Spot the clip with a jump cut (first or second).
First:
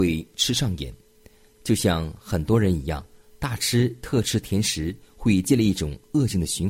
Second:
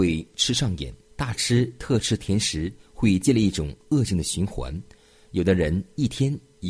second